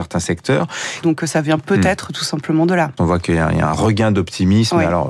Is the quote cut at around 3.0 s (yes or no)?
yes